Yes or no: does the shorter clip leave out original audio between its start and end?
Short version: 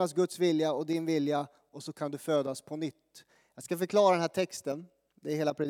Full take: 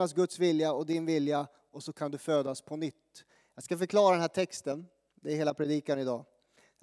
no